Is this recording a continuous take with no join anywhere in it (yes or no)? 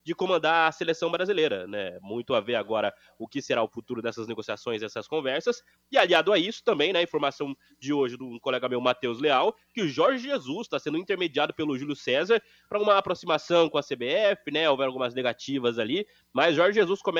yes